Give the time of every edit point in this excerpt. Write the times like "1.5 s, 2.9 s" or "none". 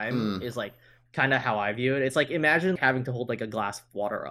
2.8 s